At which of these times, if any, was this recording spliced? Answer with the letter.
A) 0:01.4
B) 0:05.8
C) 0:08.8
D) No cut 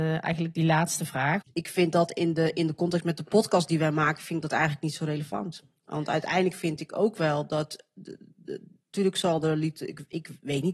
A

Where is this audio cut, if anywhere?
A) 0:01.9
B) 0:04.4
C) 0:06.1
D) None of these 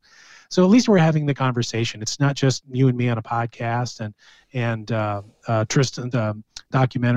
C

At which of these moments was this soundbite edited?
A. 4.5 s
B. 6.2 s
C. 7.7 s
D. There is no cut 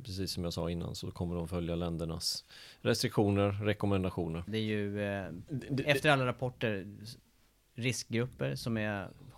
A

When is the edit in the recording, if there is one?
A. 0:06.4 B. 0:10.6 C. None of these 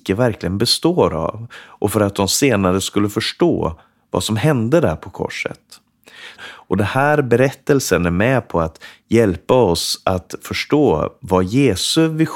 A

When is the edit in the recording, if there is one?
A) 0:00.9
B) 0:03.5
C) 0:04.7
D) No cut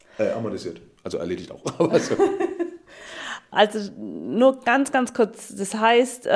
B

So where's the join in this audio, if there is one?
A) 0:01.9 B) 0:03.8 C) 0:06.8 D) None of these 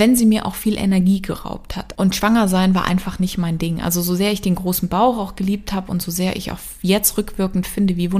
A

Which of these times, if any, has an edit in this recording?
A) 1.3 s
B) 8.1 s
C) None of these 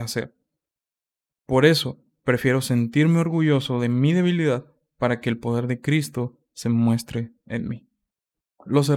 A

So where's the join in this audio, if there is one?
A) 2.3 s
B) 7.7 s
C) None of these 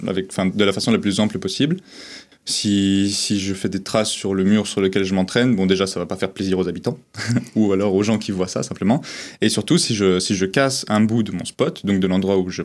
A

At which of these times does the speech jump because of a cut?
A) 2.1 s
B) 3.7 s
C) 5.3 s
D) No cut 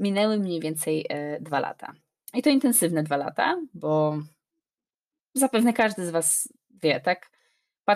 D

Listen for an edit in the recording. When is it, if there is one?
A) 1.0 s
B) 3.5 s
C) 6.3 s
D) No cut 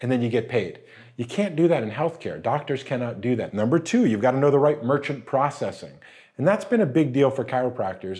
B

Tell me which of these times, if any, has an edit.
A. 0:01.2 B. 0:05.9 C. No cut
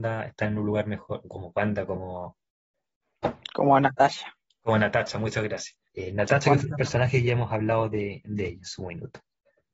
B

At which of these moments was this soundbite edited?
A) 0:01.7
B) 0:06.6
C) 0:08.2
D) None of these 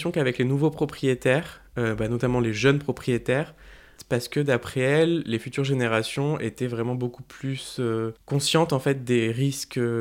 C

